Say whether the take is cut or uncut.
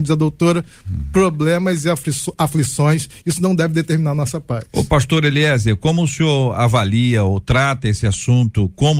uncut